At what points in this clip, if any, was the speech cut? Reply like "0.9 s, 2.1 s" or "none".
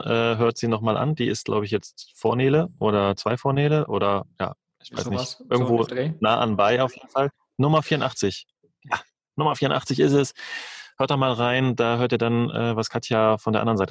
none